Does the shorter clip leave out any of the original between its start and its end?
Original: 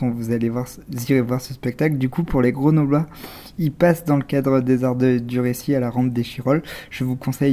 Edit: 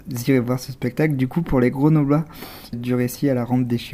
yes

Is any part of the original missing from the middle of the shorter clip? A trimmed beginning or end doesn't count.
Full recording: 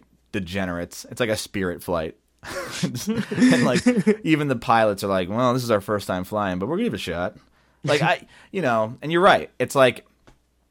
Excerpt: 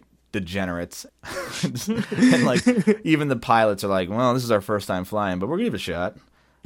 yes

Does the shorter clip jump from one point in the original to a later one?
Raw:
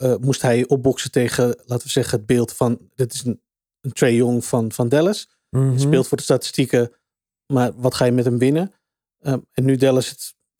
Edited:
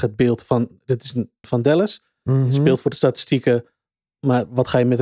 yes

